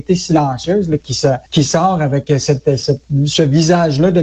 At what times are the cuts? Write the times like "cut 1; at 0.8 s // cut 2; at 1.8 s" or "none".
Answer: cut 1; at 1.5 s